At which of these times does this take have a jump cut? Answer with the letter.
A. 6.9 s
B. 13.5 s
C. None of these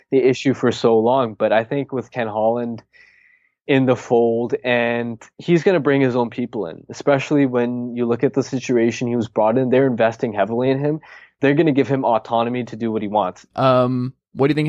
B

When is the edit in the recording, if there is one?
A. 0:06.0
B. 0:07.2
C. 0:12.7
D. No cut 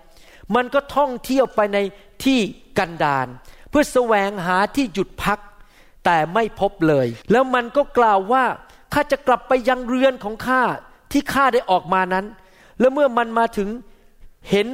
B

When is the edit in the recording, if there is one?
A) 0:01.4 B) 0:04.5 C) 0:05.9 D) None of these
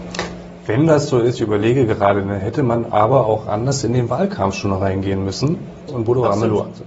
C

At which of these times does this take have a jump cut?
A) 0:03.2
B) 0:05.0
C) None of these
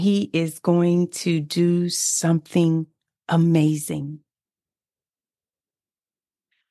C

